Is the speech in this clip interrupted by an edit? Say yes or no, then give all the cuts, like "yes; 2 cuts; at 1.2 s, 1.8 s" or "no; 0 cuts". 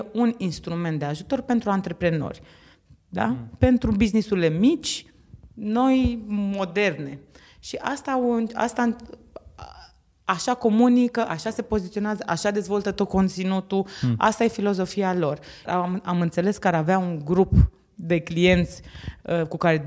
yes; 1 cut; at 15.7 s